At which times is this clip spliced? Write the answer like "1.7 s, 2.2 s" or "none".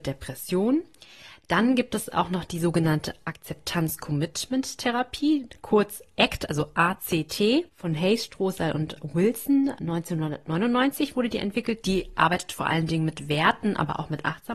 7.7 s